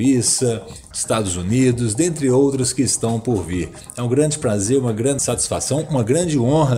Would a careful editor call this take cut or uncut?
cut